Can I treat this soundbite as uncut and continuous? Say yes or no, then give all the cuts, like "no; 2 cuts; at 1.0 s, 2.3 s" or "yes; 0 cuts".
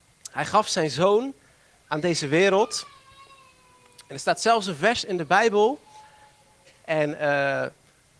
yes; 0 cuts